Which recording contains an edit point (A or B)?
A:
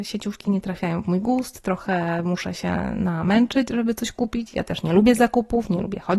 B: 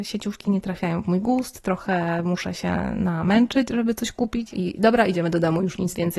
B